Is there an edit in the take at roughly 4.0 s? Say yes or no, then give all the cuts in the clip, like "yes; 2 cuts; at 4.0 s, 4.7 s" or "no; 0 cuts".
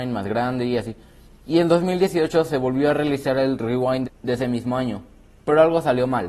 yes; 1 cut; at 4.0 s